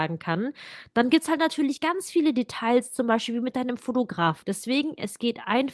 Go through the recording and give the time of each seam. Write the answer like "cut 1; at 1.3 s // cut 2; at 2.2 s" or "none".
cut 1; at 4.4 s